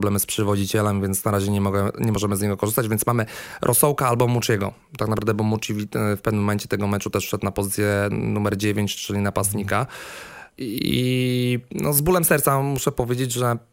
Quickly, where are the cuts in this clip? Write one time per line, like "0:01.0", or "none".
0:10.5